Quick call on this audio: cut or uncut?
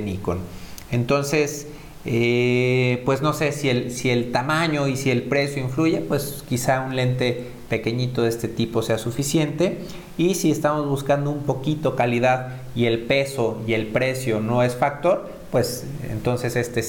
uncut